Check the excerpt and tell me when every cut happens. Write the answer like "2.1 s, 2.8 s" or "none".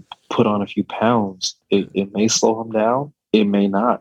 none